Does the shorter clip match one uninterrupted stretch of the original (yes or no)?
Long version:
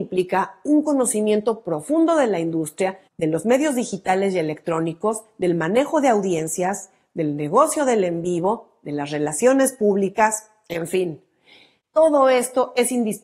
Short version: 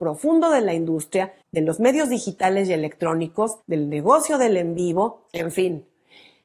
no